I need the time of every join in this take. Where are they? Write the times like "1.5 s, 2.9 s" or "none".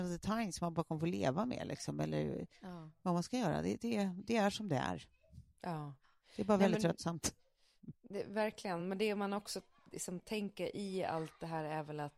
none